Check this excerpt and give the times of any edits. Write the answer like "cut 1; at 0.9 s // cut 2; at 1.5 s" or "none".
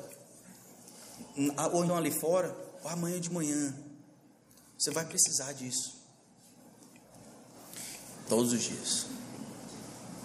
cut 1; at 1.9 s // cut 2; at 8.2 s